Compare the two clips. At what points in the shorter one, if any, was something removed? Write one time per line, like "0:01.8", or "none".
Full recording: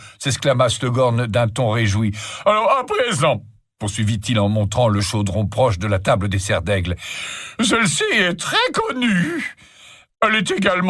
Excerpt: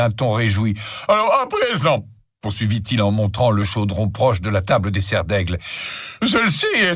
none